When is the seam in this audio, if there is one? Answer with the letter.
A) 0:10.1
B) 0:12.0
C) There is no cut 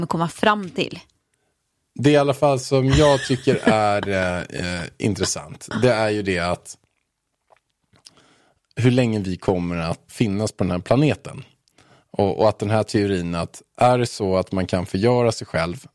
A